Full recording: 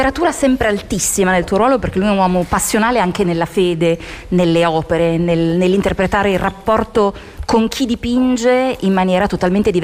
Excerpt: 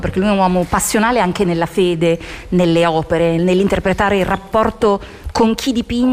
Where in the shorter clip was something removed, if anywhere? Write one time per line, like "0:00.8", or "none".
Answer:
0:03.4